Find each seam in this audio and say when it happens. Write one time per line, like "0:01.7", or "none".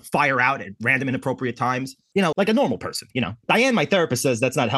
0:02.3